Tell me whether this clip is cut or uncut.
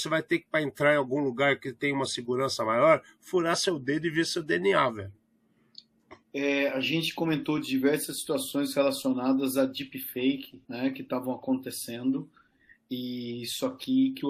cut